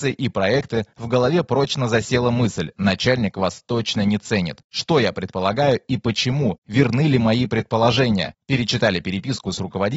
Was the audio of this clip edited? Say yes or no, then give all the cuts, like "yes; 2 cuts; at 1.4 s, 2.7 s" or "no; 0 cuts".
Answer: no; 0 cuts